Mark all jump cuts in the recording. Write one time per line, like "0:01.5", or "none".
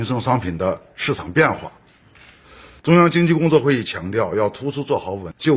0:02.8